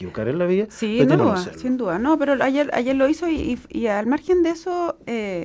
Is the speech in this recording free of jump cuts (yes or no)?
no